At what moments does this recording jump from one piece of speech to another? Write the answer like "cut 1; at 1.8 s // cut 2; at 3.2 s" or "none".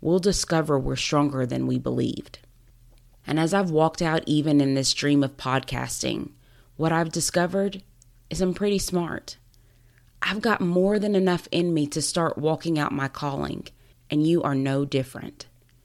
cut 1; at 13.9 s